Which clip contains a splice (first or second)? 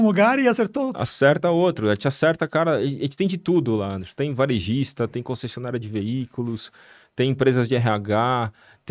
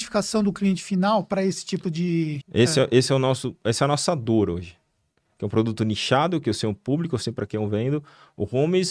second